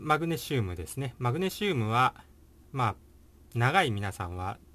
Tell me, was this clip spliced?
no; 0 cuts

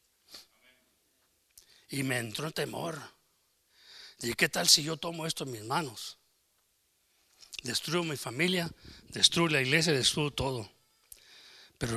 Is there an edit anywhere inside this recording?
no; 0 cuts

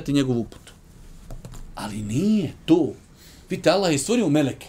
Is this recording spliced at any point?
no; 0 cuts

